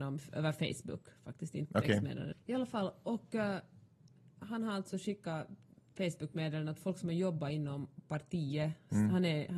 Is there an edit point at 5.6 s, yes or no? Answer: no